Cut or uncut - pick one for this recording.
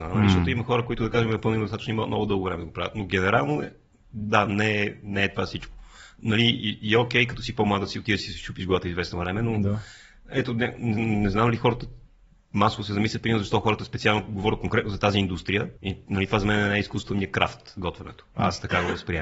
cut